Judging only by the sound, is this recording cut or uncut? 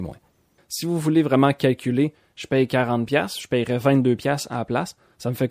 uncut